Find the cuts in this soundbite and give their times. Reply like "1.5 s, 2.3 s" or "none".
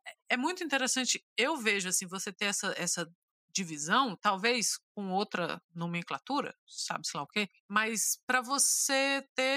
none